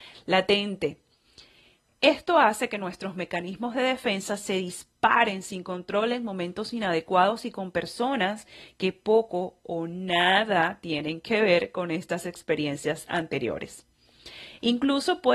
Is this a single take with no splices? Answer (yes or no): yes